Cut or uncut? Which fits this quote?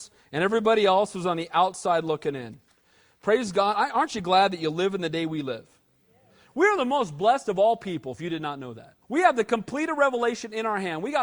cut